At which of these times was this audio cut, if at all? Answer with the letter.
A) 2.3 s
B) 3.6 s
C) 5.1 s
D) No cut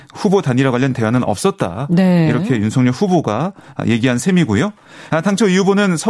C